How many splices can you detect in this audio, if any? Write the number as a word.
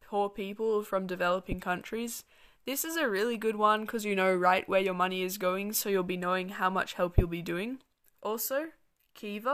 one